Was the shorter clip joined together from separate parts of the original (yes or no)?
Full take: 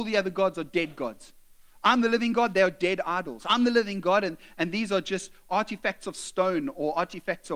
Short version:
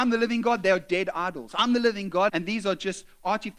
yes